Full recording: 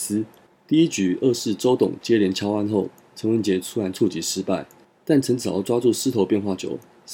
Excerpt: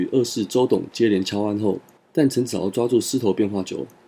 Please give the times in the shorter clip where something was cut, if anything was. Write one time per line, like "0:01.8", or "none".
0:02.0